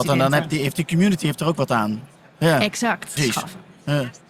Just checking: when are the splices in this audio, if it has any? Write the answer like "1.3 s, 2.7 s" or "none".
3.2 s